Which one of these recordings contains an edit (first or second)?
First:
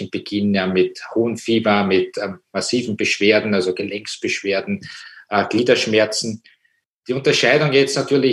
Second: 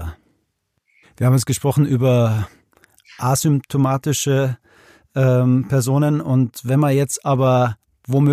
second